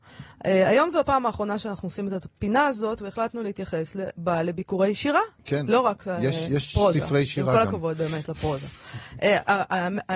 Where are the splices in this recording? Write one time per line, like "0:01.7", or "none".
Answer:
0:05.4